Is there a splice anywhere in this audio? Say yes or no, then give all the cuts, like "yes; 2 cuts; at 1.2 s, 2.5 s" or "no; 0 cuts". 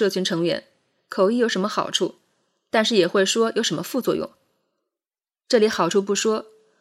no; 0 cuts